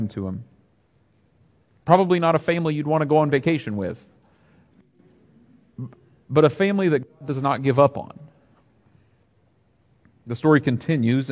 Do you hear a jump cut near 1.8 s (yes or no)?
yes